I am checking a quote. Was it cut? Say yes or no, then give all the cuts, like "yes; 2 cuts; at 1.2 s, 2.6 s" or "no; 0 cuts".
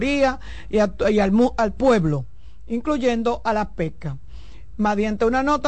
no; 0 cuts